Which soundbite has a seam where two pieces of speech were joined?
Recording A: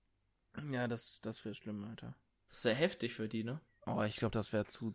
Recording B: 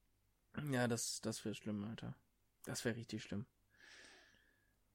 A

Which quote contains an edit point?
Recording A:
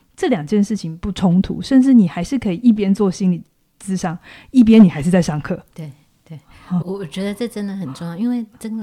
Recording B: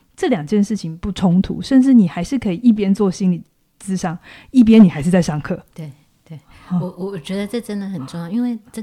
A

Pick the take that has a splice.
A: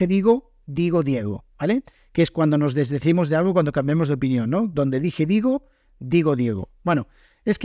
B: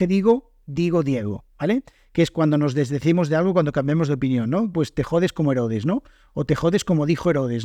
B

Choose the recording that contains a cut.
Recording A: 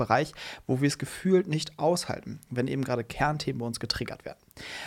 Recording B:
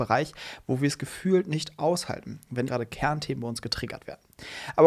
B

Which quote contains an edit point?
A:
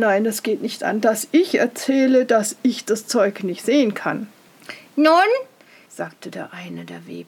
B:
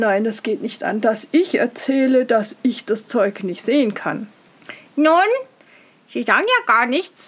A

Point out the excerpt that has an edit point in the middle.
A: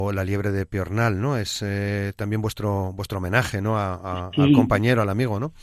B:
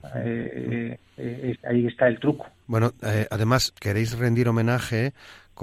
B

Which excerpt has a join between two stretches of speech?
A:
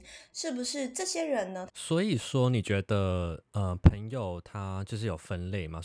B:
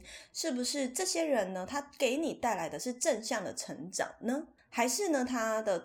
A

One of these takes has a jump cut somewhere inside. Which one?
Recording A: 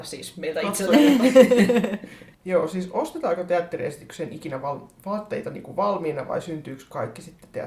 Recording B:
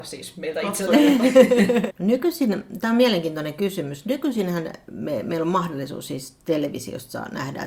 B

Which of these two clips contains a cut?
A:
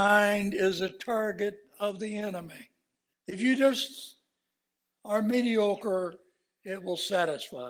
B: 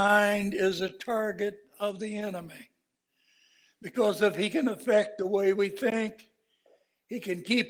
A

